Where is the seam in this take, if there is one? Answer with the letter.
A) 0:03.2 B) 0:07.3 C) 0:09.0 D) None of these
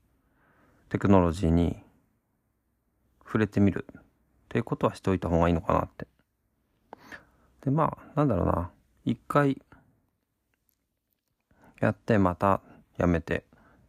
D